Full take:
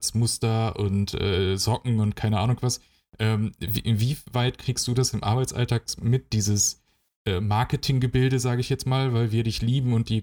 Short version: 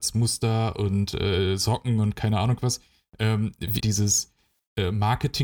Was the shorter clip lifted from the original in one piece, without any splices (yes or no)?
no